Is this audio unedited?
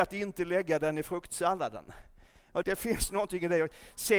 no; 1 cut; at 2.6 s

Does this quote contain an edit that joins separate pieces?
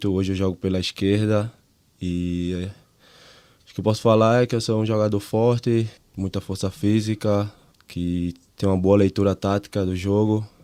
yes; 2 cuts; at 6.0 s, 7.7 s

